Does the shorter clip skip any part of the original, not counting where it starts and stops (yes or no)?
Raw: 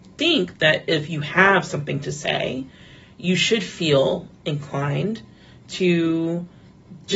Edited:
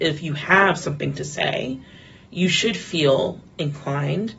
no